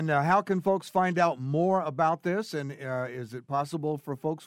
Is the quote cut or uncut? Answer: uncut